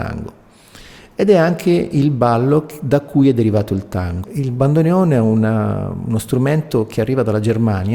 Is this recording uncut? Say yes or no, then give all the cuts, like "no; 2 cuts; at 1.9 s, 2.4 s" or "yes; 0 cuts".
no; 1 cut; at 4.2 s